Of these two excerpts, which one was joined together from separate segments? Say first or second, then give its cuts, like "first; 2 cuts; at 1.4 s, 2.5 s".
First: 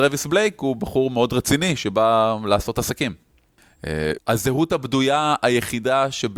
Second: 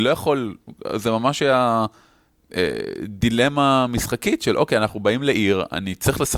first; 1 cut; at 4.2 s